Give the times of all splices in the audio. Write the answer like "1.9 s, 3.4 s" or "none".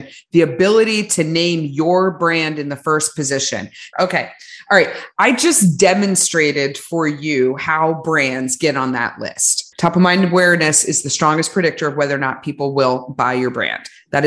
3.9 s, 9.7 s